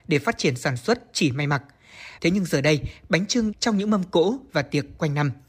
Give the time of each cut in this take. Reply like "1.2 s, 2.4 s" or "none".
2.2 s, 3.5 s